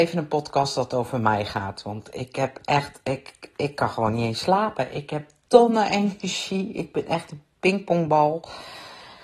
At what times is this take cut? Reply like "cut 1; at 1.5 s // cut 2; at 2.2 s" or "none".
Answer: none